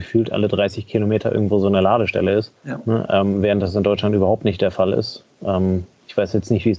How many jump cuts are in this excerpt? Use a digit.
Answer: 1